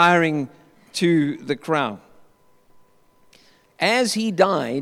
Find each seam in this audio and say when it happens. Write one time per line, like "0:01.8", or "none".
none